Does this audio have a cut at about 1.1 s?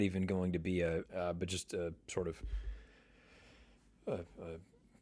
yes; 1 cut; at 1.1 s

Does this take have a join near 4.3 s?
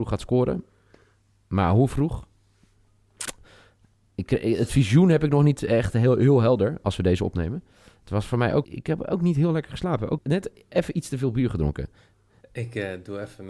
no; 3 cuts; at 8.6 s, 10.2 s, 12.4 s

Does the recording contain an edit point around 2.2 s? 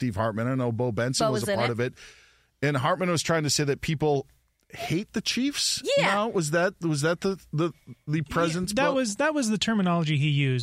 no; 0 cuts

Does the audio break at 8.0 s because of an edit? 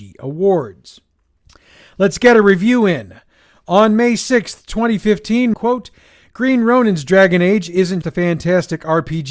yes; 2 cuts; at 5.5 s, 8.0 s

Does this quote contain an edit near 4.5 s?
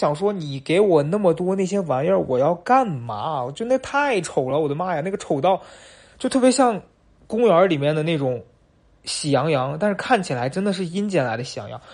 no; 0 cuts

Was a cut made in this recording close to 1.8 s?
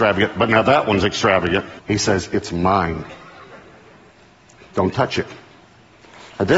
yes; 1 cut; at 1.8 s

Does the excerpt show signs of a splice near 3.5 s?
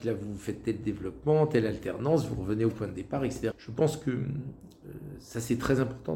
yes; 1 cut; at 3.5 s

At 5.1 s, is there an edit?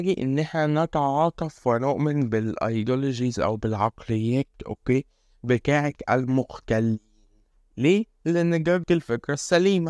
no; 1 cut; at 8.8 s

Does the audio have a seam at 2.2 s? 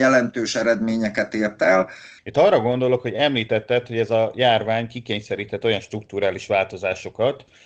yes; 1 cut; at 2.2 s

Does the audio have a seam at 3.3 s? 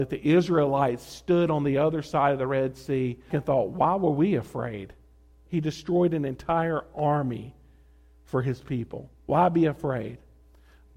yes; 3 cuts; at 3.3 s, 5.5 s, 9.2 s

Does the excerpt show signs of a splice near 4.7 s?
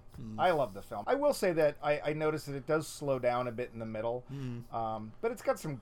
no; 1 cut; at 1.0 s

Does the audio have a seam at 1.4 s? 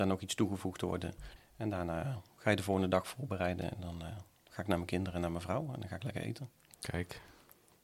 yes; 1 cut; at 1.4 s

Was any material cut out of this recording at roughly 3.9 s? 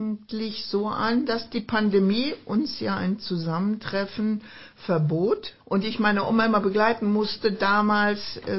no; 1 cut; at 5.6 s

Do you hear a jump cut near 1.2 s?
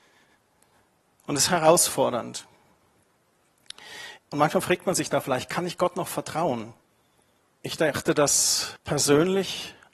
yes; 2 cuts; at 1.2 s, 4.2 s

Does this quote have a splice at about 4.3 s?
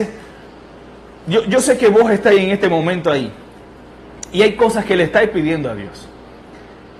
no; 0 cuts

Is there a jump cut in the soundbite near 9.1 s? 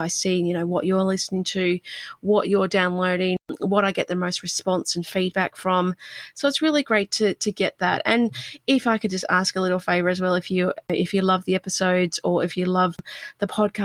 no; 0 cuts

